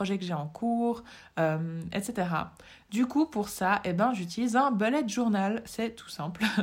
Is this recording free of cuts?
yes; 0 cuts

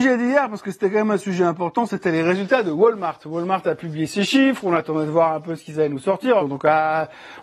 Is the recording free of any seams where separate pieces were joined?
no; 1 cut; at 6.4 s

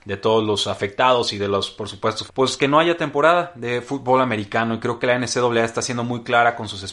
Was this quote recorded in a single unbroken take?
no; 1 cut; at 2.3 s

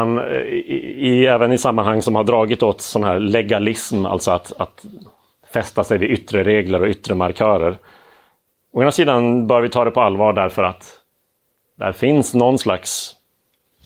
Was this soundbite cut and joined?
no; 0 cuts

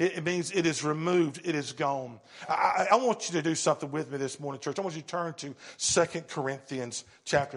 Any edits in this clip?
no; 0 cuts

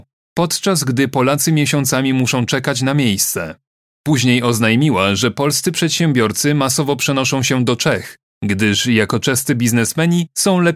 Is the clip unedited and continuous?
yes; 0 cuts

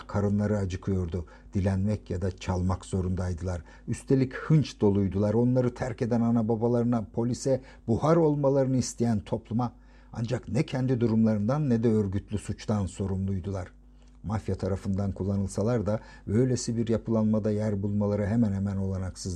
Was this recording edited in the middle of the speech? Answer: no; 0 cuts

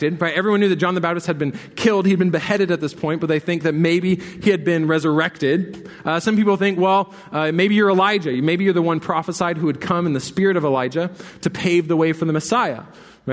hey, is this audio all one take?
yes; 0 cuts

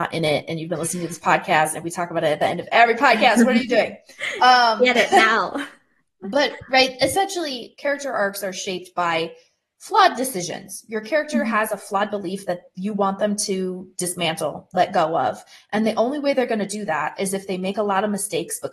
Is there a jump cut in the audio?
no; 0 cuts

